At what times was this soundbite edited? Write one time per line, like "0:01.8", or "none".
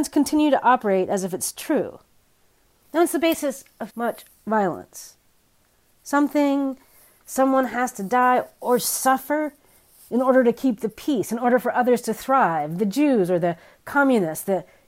0:03.9